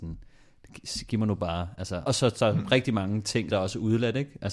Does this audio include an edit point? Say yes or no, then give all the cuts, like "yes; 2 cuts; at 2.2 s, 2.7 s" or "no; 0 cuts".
yes; 2 cuts; at 2.1 s, 3.5 s